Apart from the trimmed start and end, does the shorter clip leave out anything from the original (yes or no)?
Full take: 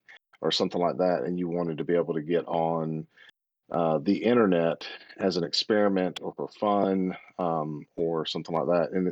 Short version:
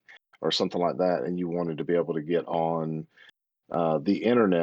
no